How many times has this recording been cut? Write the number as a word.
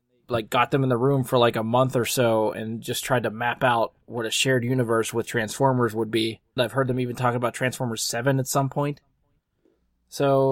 one